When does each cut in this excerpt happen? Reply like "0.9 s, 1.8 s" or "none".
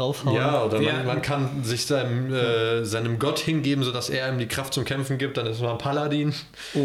none